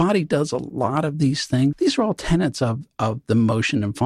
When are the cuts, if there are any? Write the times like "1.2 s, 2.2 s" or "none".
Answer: 1.7 s